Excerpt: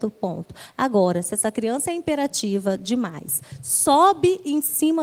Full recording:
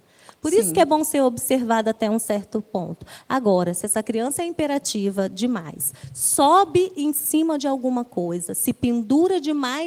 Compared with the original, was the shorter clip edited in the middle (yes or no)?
no